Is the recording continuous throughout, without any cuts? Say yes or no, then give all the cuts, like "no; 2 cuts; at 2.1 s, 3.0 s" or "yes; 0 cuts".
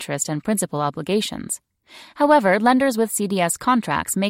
yes; 0 cuts